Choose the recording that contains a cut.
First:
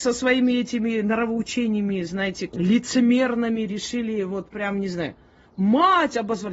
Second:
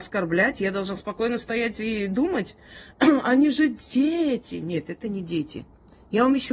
first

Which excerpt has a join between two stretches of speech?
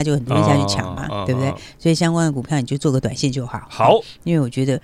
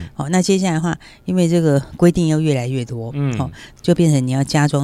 second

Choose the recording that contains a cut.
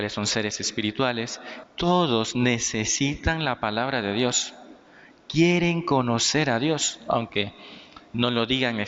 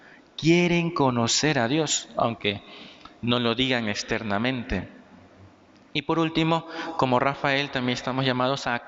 first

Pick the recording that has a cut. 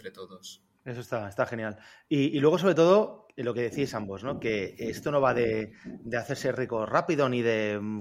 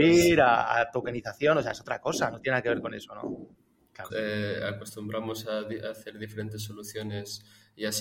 second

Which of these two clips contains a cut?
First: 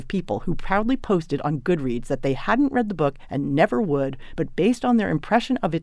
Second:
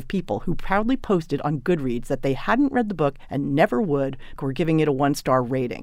second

